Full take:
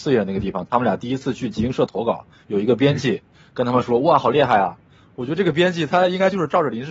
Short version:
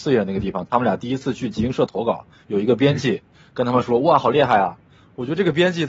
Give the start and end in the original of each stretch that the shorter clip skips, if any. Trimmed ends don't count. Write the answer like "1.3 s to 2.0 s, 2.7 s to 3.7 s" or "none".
none

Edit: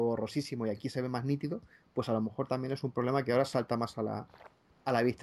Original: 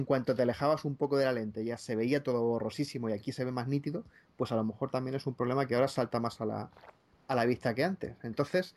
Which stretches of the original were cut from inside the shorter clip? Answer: none

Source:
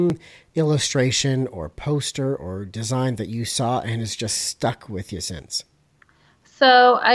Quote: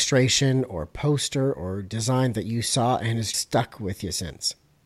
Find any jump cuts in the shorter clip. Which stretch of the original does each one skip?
4.2 s to 4.4 s

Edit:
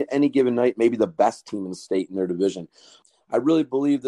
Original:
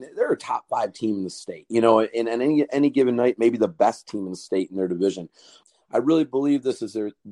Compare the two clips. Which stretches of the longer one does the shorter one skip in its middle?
none

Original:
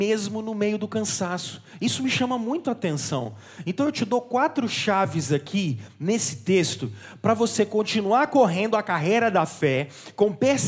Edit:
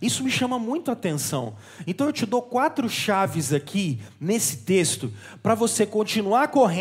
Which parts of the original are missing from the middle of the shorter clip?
none

